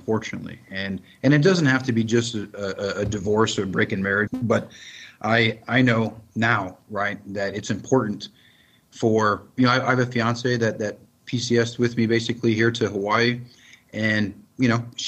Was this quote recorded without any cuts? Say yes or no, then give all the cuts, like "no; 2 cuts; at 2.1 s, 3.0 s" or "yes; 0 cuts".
no; 1 cut; at 4.3 s